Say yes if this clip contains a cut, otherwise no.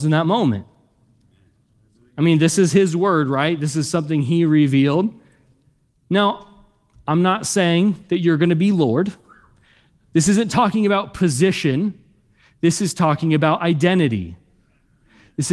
no